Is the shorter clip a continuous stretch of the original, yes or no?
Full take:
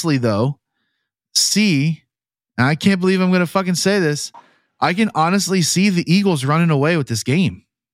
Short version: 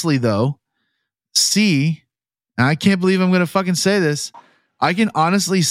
yes